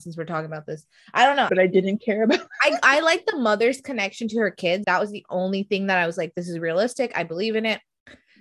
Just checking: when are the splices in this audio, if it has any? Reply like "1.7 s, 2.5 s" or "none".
1.5 s, 4.8 s